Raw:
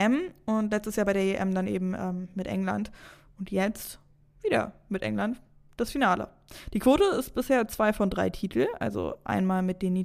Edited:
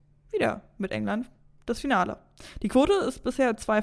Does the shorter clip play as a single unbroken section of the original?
yes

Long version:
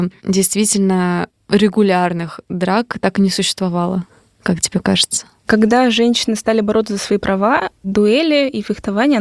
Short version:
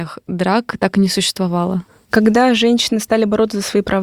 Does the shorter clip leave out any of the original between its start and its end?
yes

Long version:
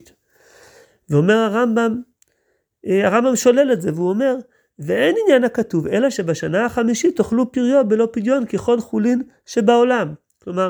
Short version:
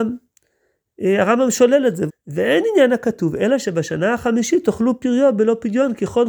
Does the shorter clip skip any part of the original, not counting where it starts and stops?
yes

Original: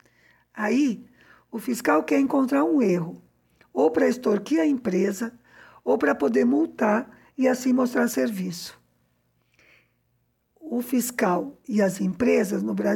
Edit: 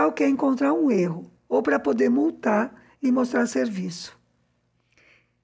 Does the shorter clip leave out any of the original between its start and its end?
yes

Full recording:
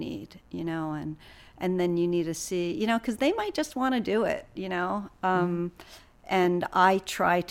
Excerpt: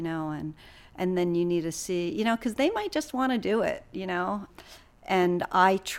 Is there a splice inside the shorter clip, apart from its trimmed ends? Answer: yes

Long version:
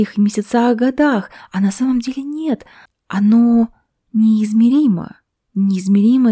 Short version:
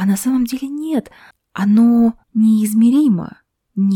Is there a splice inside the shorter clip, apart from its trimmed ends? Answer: yes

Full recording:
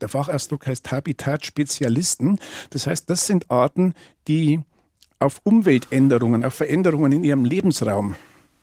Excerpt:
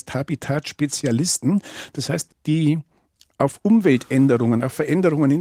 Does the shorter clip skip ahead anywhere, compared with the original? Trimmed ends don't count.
yes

